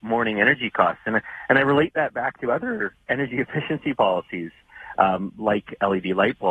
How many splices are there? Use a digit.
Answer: 0